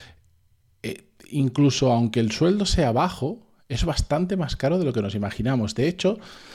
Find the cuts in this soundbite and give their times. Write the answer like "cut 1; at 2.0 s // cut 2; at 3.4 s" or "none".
none